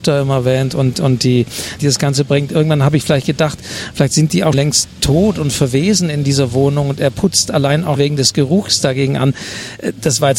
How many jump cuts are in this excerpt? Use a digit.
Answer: 3